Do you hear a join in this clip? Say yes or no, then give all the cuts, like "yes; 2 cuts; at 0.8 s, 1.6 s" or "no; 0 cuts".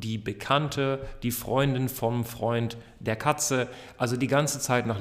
no; 0 cuts